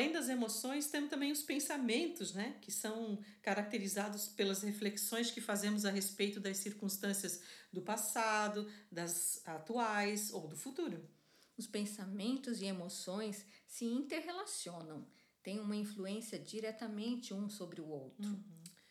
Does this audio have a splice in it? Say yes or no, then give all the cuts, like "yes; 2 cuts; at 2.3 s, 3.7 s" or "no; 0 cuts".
no; 0 cuts